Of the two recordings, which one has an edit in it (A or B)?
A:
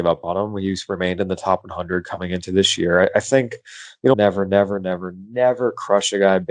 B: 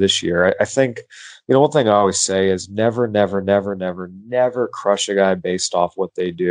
A